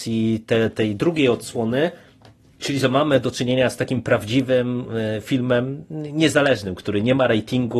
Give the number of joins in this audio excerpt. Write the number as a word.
zero